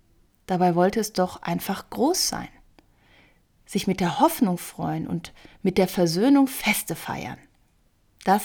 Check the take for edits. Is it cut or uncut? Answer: uncut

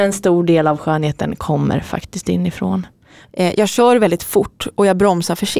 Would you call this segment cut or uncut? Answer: cut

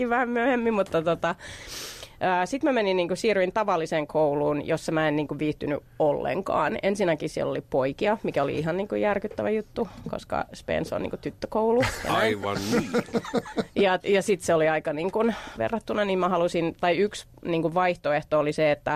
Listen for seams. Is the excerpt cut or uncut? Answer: cut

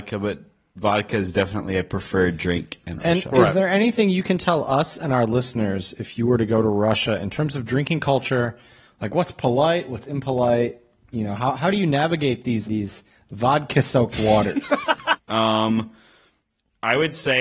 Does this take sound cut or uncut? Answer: cut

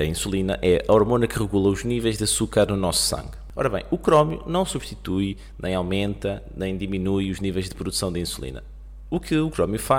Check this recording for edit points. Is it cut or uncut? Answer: uncut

